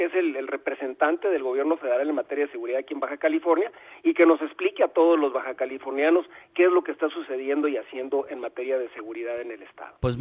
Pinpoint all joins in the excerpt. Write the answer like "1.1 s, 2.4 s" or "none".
none